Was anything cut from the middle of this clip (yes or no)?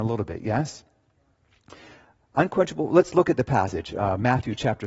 no